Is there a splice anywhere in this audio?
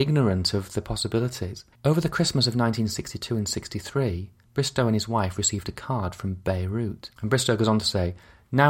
yes; 2 cuts; at 1.8 s, 7.2 s

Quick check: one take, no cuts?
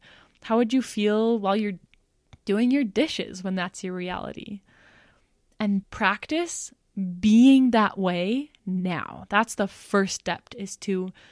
no; 1 cut; at 5.8 s

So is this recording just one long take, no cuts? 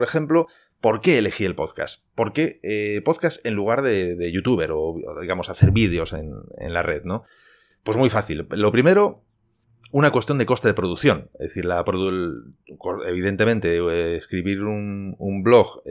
yes; 0 cuts

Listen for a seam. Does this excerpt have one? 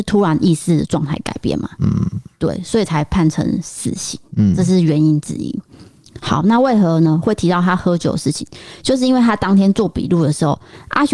no; 0 cuts

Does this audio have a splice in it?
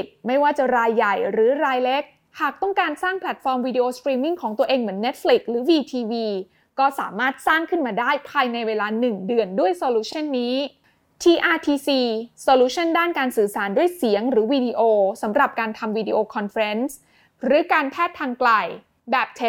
no; 0 cuts

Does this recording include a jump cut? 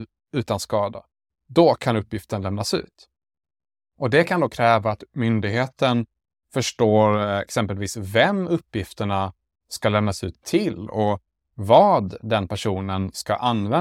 no; 0 cuts

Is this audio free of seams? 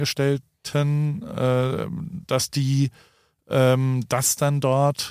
yes; 0 cuts

